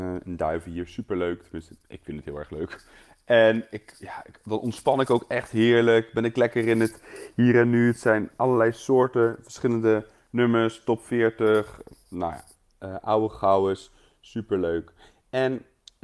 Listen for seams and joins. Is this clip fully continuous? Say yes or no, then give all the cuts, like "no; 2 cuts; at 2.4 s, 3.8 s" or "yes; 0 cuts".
yes; 0 cuts